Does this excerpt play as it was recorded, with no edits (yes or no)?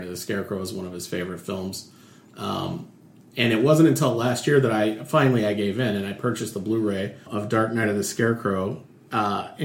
no